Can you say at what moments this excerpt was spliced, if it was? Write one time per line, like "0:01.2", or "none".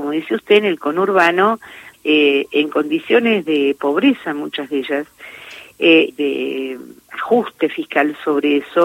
0:01.9
0:06.1